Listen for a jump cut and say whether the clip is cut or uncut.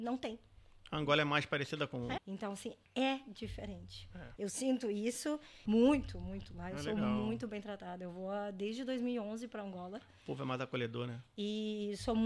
cut